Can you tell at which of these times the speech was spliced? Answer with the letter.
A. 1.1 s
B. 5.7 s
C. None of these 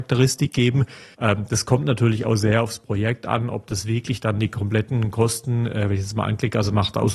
A